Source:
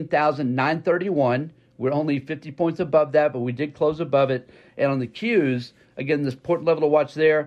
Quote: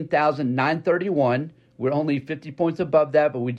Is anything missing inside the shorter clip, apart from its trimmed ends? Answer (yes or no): no